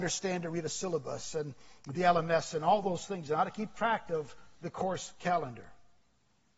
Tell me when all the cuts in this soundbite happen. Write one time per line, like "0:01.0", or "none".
none